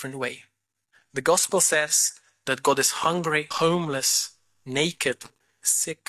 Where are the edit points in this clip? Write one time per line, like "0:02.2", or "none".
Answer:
0:03.5